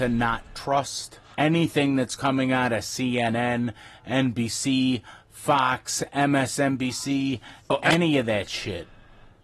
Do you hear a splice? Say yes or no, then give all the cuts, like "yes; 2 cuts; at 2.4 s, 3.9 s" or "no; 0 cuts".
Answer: yes; 2 cuts; at 1.2 s, 7.6 s